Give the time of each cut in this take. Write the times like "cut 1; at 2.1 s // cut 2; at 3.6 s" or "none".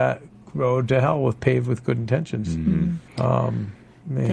cut 1; at 3.1 s